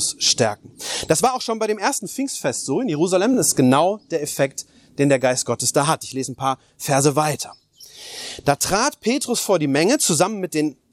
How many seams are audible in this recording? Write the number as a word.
zero